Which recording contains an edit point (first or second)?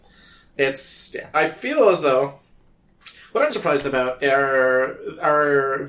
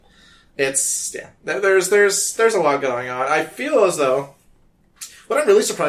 first